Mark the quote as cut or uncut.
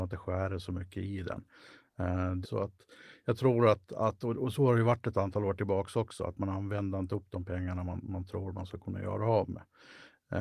cut